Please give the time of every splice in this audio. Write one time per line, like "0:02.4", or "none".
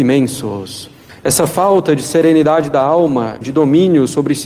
0:01.1
0:03.4